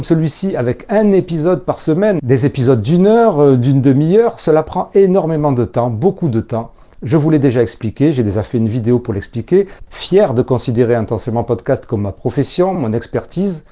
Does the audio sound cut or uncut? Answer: cut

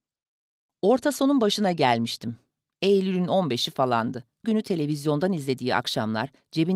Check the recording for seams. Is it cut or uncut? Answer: cut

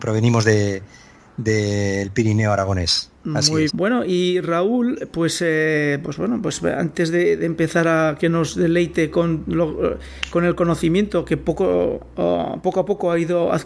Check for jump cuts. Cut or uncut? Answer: cut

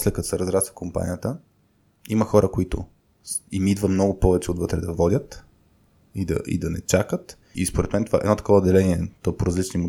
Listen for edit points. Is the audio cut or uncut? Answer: cut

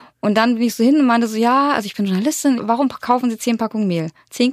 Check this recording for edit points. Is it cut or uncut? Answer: cut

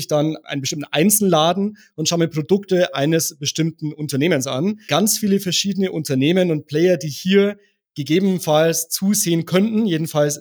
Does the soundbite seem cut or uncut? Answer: uncut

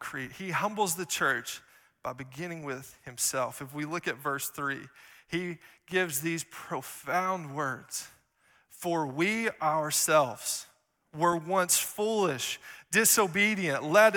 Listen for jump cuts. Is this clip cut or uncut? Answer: uncut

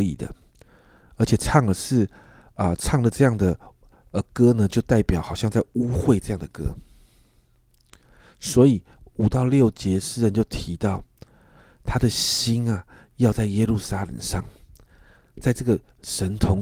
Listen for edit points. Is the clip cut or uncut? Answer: uncut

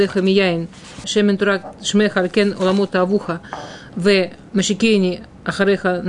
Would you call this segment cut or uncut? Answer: cut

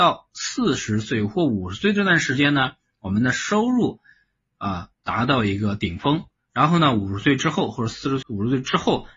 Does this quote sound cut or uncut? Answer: cut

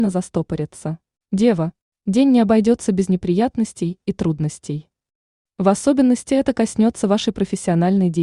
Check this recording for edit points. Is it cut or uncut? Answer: cut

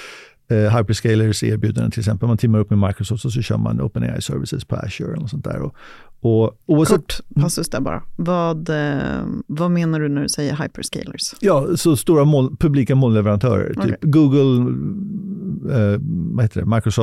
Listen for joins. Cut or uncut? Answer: uncut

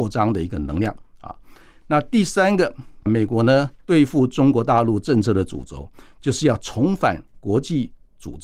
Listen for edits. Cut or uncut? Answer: uncut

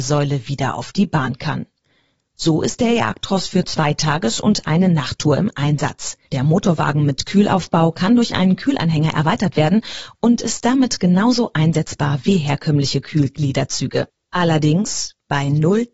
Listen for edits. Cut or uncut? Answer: cut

